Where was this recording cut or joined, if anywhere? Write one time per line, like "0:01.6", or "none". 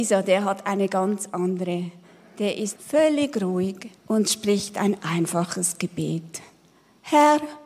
0:02.8
0:04.0